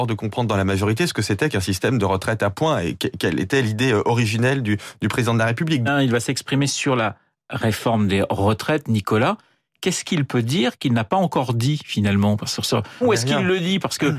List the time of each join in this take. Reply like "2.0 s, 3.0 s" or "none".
5.9 s, 13.0 s